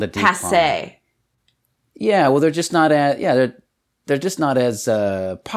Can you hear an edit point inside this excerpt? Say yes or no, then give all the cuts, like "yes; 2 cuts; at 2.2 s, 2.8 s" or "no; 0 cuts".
no; 0 cuts